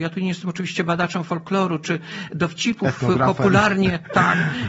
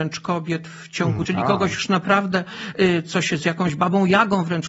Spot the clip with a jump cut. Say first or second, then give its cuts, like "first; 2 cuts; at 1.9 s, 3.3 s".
second; 1 cut; at 1.2 s